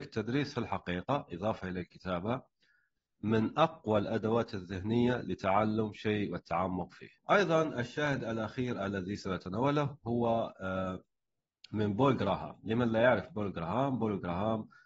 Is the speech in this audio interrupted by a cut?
yes; 1 cut; at 7.2 s

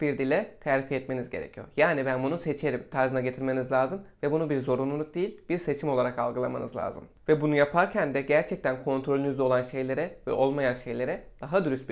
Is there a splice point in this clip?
no; 0 cuts

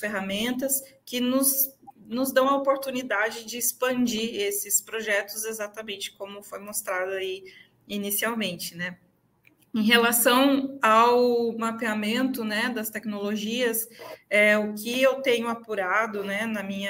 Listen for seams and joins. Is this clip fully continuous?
yes; 0 cuts

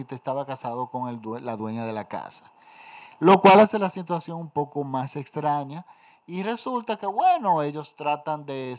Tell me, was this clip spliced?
no; 0 cuts

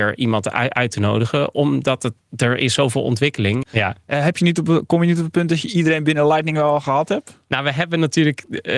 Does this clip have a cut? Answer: yes; 1 cut; at 3.6 s

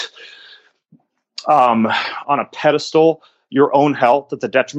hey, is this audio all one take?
no; 1 cut; at 2.2 s

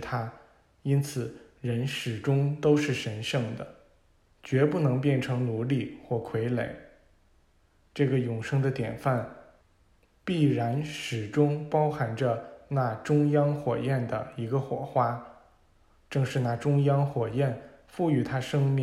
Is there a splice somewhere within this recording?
yes; 1 cut; at 4.3 s

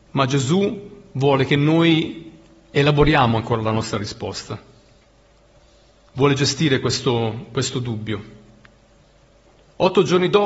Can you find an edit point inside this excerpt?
no; 0 cuts

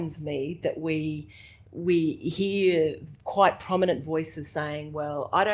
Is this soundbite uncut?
yes; 0 cuts

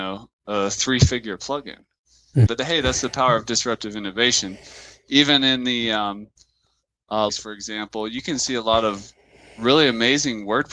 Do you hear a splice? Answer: yes; 2 cuts; at 2.5 s, 7.3 s

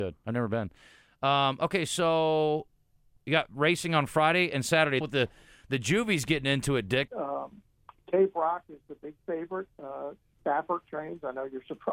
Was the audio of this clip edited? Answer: yes; 2 cuts; at 5.0 s, 7.1 s

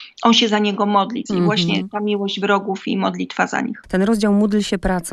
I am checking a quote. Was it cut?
yes; 1 cut; at 1.3 s

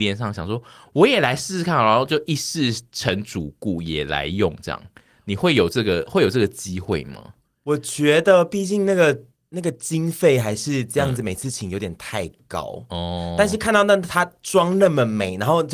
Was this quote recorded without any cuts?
yes; 0 cuts

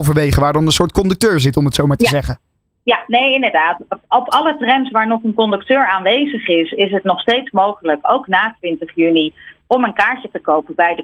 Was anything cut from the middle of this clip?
no; 0 cuts

